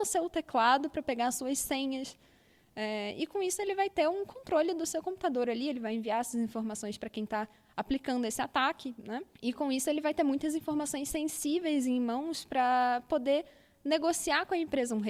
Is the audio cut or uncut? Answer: uncut